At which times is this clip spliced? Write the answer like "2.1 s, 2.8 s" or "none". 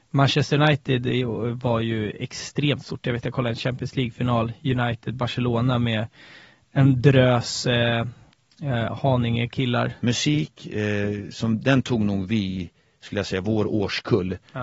10.0 s